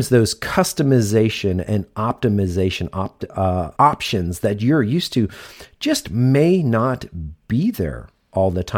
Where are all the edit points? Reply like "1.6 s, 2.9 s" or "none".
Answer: 3.7 s